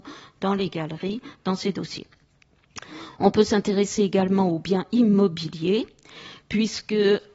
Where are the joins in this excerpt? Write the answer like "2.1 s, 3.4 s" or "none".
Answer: none